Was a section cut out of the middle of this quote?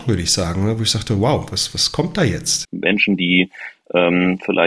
yes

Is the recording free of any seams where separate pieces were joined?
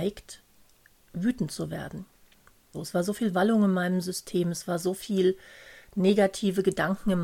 no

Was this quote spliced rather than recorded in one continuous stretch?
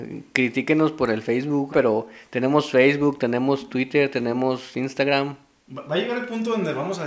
yes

